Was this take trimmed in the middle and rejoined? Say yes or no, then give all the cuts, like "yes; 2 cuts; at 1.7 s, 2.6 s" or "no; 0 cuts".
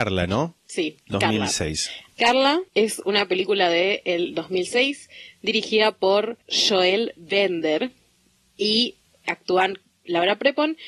yes; 2 cuts; at 2.7 s, 6.4 s